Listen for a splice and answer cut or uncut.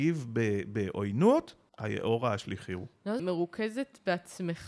cut